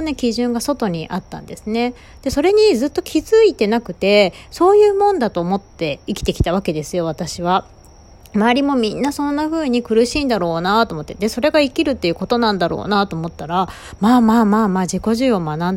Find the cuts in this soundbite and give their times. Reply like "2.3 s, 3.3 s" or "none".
none